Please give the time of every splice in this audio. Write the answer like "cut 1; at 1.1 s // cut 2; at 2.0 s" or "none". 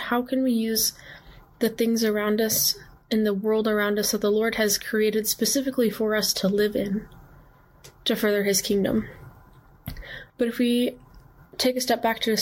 cut 1; at 10.3 s